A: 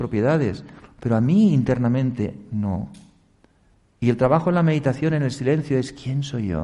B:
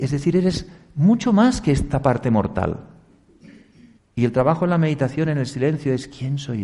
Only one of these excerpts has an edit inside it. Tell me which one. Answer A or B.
B